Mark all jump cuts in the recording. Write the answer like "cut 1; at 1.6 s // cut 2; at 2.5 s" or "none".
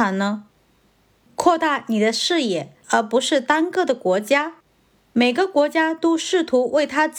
cut 1; at 2.8 s